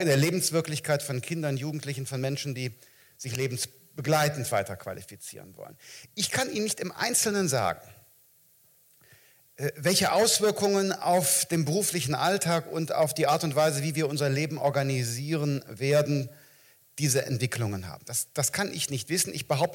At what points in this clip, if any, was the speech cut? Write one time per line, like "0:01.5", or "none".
none